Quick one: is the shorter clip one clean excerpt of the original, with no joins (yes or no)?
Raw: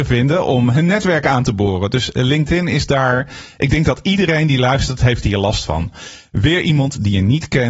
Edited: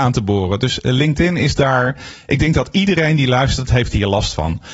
yes